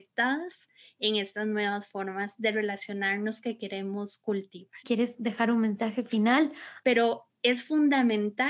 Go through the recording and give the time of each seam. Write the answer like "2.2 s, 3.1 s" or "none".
4.8 s, 6.8 s